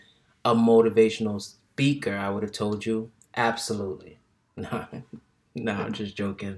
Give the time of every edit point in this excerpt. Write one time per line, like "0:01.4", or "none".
none